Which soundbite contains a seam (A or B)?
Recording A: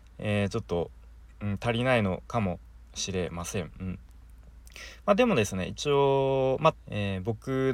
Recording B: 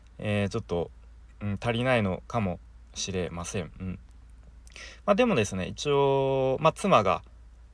A